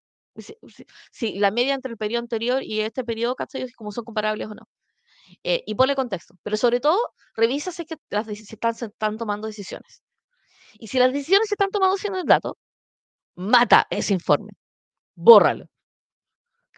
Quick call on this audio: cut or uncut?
uncut